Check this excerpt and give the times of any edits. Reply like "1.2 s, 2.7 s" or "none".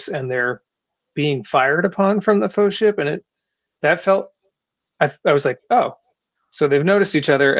none